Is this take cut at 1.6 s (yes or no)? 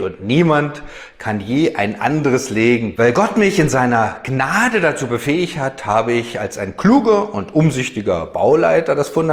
no